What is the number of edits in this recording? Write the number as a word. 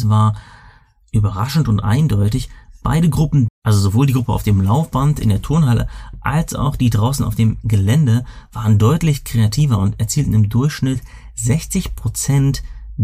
one